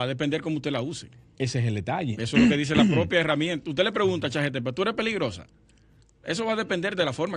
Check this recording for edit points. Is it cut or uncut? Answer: uncut